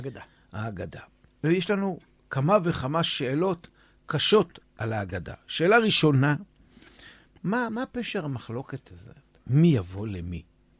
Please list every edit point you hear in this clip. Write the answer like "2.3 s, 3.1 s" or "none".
7.7 s